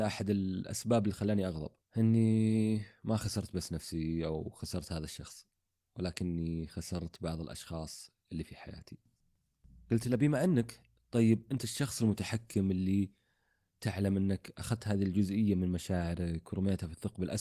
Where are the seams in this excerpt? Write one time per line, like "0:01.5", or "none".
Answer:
none